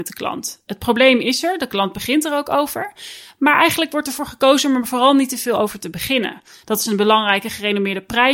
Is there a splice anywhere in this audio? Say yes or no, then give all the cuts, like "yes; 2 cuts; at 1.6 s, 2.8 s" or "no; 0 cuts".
yes; 1 cut; at 6.6 s